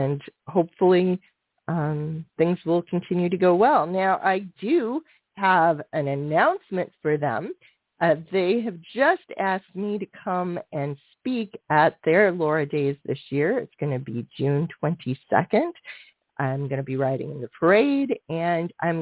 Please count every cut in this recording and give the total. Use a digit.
1